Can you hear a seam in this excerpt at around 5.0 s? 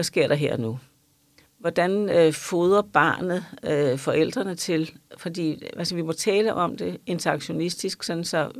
no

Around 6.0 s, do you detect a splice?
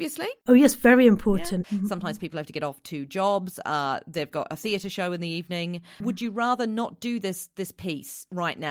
yes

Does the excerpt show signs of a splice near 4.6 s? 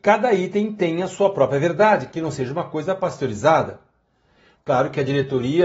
yes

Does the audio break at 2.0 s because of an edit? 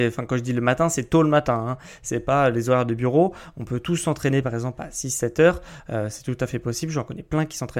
no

